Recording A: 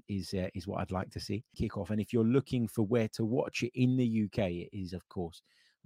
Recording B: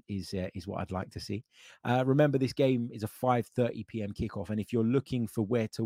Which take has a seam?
A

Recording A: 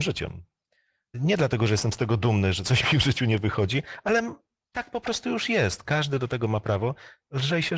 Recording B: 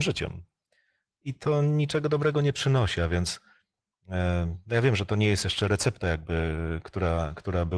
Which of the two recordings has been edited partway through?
A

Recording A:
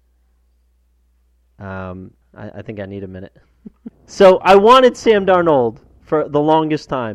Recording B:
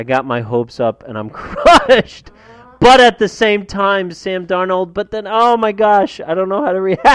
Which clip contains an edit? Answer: A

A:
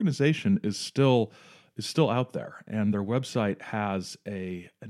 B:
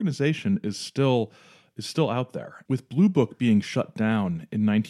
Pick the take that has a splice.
B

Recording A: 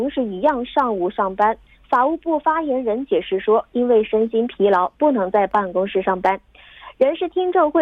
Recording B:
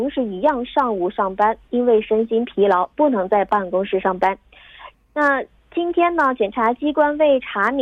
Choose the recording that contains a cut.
B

